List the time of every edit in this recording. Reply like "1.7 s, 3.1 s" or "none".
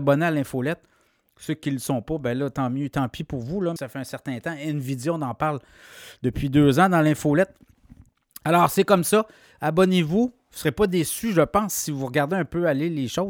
3.8 s

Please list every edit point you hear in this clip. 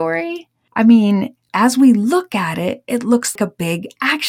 3.4 s

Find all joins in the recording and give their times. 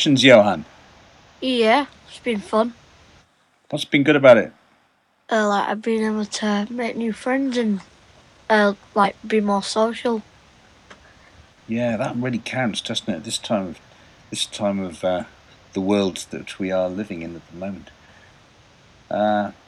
none

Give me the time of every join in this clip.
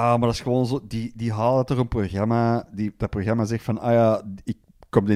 none

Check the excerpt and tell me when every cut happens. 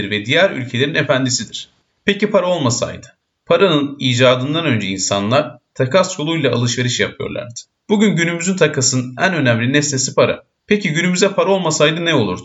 1.9 s

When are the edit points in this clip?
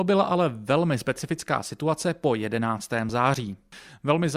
none

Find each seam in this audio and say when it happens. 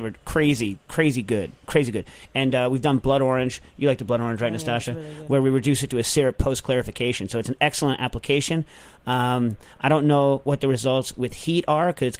none

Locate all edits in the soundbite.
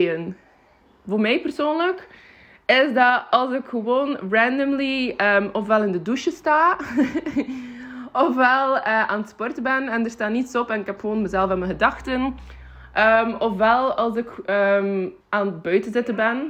15.2 s

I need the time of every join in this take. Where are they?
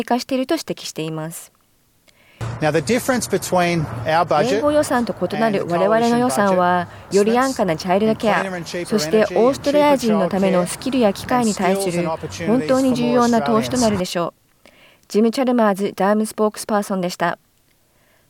7.1 s

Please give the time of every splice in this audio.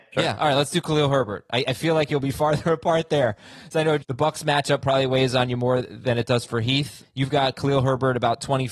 4.0 s, 7.0 s

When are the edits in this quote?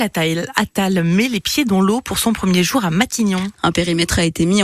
3.5 s

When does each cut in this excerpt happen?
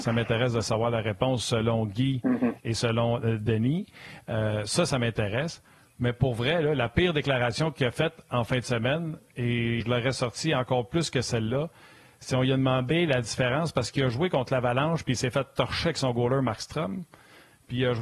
9.8 s

